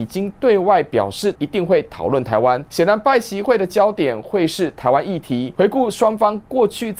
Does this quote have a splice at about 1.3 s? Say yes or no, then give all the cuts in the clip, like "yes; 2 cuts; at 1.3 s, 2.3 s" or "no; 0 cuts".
yes; 1 cut; at 1.3 s